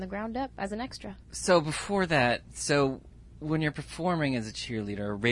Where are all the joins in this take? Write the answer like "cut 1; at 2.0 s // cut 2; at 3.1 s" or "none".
cut 1; at 1.2 s